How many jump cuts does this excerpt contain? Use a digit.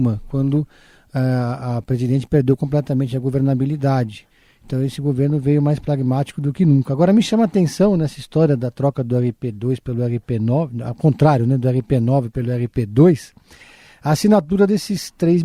0